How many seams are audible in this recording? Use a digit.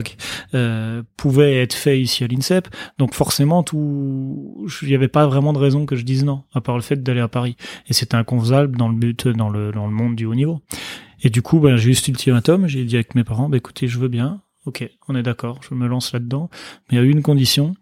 0